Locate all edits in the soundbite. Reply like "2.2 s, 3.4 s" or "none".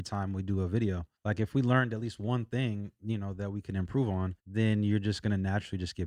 1.2 s, 4.4 s